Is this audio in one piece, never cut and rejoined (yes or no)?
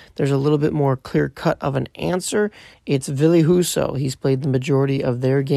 yes